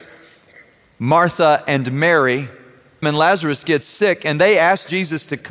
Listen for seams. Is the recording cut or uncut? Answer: cut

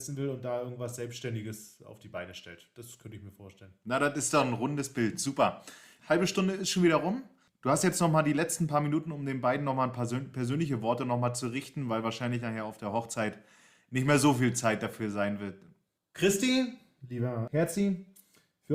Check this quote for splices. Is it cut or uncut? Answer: cut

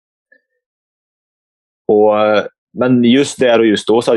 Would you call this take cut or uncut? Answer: uncut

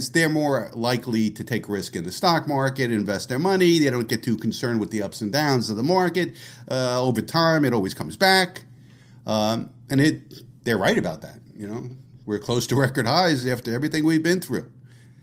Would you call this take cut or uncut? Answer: uncut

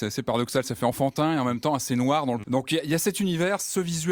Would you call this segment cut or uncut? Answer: cut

